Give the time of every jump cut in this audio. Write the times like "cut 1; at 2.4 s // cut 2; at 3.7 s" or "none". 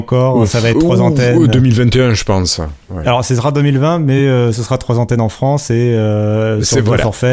none